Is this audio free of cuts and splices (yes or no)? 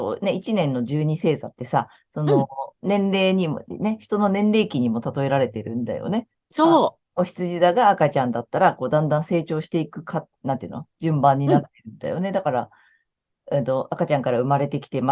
yes